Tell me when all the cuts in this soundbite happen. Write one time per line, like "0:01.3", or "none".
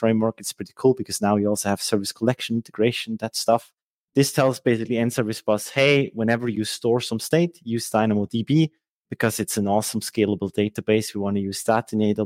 0:03.9